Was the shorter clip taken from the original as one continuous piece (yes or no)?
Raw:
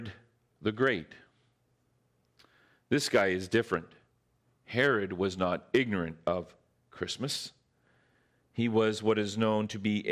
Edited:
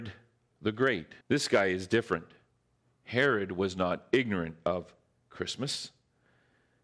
no